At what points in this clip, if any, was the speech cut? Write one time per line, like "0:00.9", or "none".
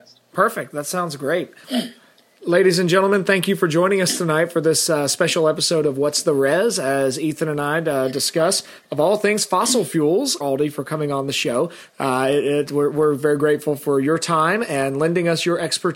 0:01.6
0:10.4